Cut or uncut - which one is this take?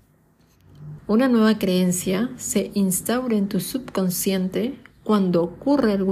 cut